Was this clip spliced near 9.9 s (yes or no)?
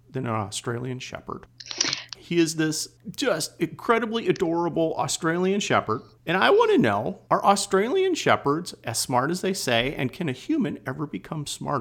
no